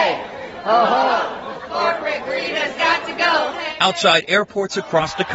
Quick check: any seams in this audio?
no; 0 cuts

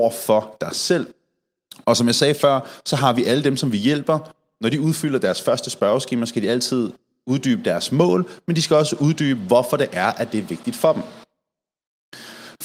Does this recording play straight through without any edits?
yes; 0 cuts

